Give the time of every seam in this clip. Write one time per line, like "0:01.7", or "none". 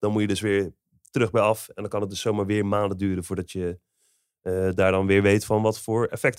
none